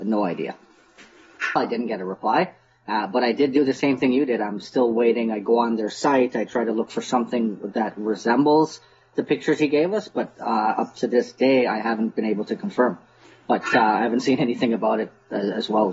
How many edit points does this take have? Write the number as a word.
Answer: one